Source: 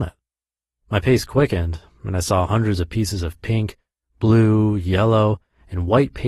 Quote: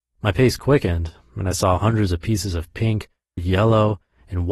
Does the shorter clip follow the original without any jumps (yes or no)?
no